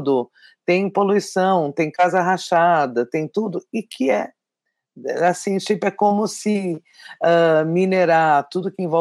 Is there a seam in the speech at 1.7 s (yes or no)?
no